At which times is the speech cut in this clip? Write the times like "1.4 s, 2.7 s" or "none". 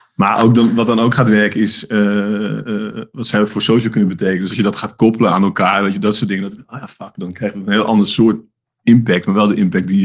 none